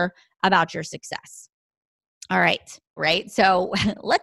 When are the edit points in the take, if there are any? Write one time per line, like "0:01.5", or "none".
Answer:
0:03.0

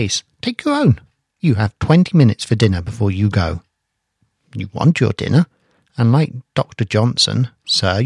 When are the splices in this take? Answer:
0:01.3

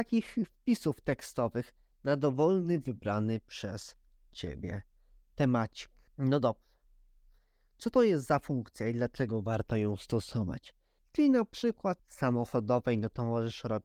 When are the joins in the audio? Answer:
0:06.1
0:11.0
0:12.0

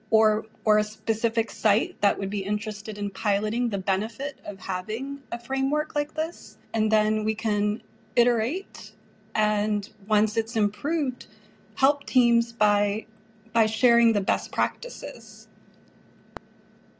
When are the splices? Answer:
0:06.6

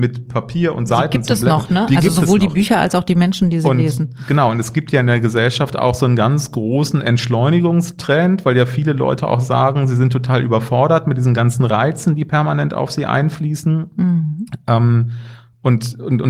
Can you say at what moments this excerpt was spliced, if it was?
none

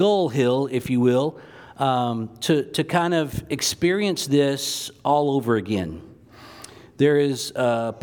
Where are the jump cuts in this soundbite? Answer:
none

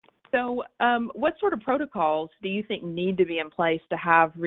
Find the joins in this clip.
none

